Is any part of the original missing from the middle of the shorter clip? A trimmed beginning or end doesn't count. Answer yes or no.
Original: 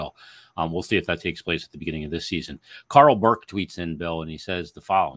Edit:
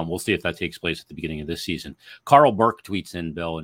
no